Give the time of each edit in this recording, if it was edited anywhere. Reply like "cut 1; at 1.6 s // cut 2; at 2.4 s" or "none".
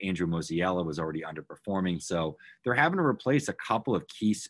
cut 1; at 2.0 s